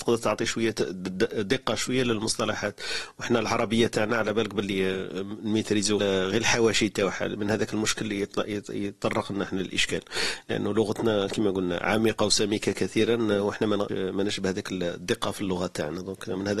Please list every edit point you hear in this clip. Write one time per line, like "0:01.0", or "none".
0:06.0
0:13.9